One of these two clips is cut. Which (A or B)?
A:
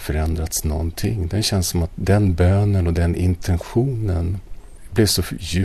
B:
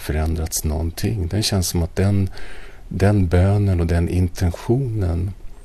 A